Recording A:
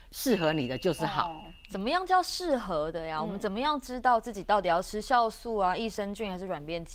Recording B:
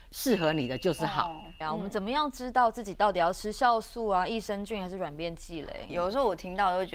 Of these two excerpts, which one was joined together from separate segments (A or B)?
B